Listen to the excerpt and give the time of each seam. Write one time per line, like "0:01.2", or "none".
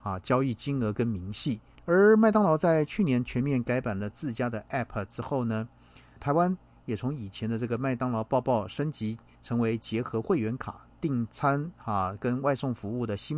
0:01.8
0:06.2

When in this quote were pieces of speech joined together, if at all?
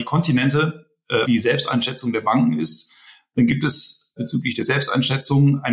0:01.2

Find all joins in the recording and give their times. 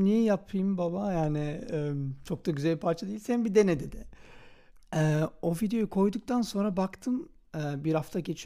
0:04.7

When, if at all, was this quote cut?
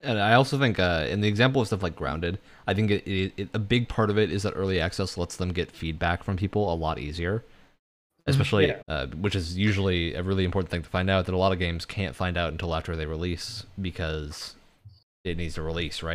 0:08.8

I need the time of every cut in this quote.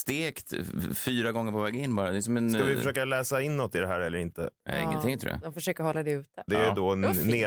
0:06.5

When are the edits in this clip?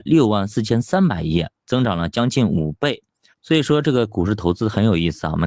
0:03.3

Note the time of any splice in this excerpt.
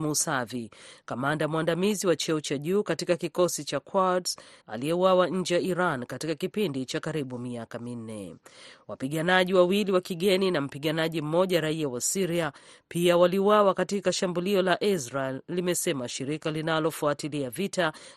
0:04.6

